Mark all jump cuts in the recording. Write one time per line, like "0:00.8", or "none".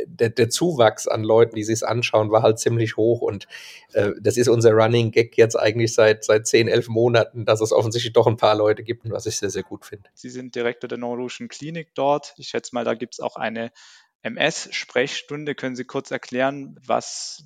0:09.0
0:10.2